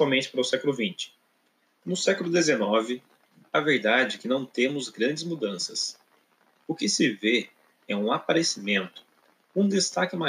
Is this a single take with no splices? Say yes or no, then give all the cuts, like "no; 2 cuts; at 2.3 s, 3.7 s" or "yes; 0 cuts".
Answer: no; 1 cut; at 1.8 s